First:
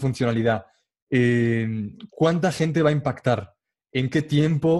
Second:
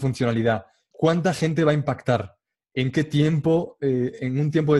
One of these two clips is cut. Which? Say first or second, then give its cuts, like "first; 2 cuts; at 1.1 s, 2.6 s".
second; 1 cut; at 0.9 s